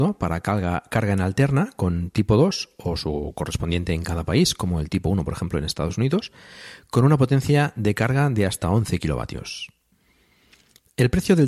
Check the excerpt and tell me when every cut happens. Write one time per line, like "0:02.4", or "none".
none

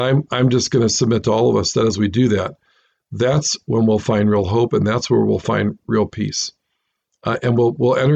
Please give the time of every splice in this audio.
none

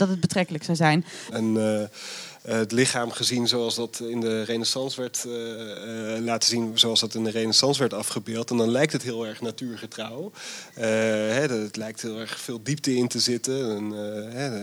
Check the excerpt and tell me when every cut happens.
0:01.3

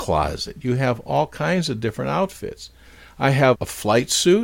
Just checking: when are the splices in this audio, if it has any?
none

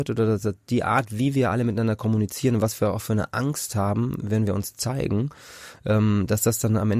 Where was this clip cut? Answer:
none

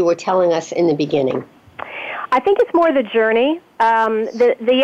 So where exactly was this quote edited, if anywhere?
none

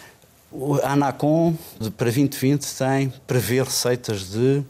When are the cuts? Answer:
0:01.8

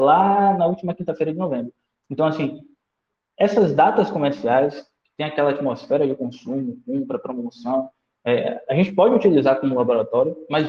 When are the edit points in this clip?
none

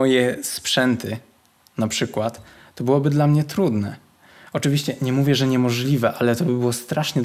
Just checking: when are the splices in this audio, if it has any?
none

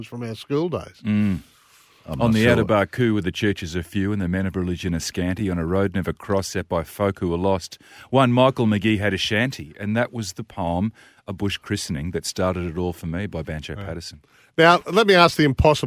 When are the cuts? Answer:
none

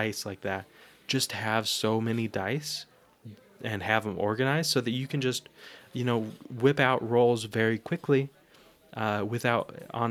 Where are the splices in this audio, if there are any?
none

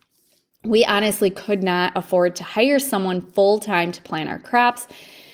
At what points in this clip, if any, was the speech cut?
none

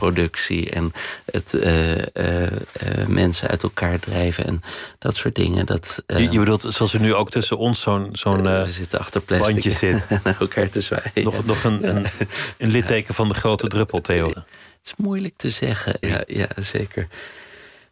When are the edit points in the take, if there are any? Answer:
0:14.3
0:16.0

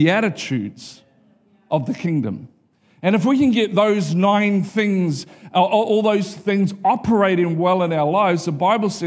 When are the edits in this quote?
none

